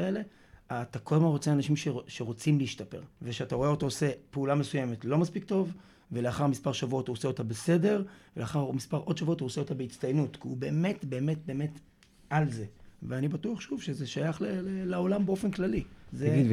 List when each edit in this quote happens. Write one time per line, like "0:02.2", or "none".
0:03.1